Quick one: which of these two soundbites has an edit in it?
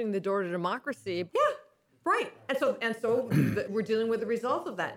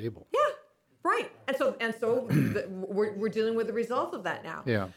first; 2 cuts; at 1.3 s, 3.7 s

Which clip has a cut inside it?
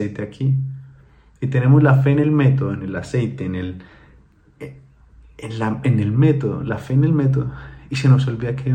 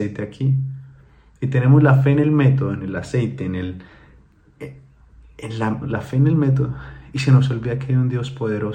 second; 1 cut; at 5.8 s

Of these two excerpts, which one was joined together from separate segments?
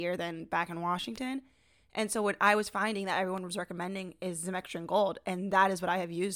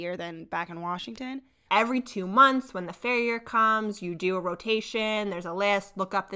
second; 1 cut; at 1.7 s

